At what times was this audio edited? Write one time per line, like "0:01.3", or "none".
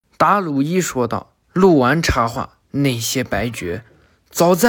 0:01.4
0:02.6